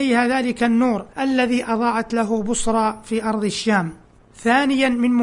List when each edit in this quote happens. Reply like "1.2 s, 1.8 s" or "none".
1.1 s